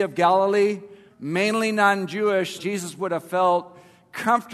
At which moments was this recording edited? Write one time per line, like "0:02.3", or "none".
0:01.1
0:02.6